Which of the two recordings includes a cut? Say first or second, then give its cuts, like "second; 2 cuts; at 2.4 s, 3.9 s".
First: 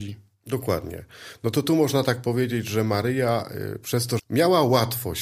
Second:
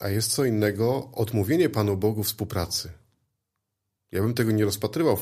first; 1 cut; at 4.2 s